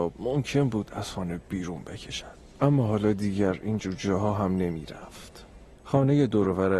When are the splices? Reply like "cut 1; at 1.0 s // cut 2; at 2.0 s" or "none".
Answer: cut 1; at 5.8 s